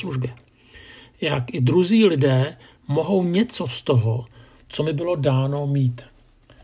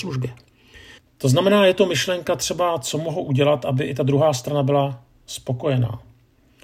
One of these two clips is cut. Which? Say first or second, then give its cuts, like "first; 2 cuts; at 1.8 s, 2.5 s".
second; 1 cut; at 1.0 s